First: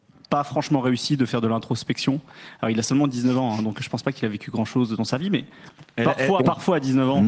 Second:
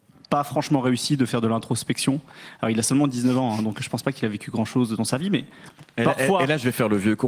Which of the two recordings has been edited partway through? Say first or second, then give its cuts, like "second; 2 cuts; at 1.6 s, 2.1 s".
first; 1 cut; at 6.4 s